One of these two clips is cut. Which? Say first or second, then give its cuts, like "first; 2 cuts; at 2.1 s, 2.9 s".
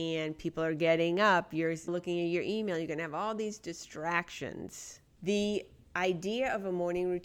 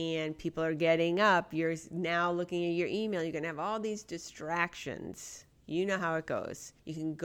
first; 2 cuts; at 1.9 s, 5.2 s